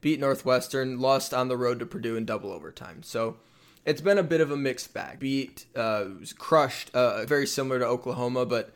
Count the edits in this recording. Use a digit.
2